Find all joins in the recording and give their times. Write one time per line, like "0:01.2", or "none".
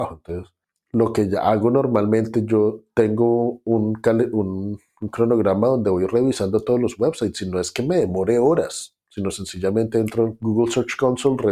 none